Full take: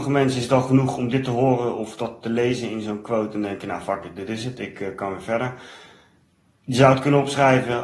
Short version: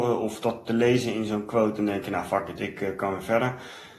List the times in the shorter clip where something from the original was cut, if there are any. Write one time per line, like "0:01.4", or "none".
0:02.6